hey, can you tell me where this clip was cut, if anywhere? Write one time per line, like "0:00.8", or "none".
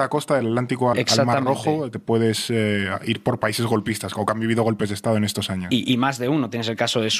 0:00.9